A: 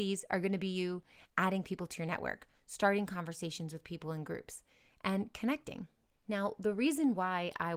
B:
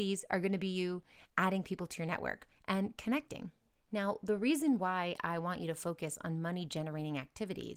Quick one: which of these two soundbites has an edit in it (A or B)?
B